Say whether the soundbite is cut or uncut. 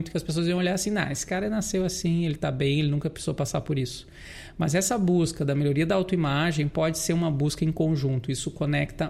uncut